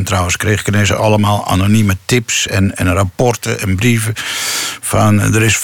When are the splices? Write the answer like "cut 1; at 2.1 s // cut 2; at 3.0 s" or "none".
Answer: none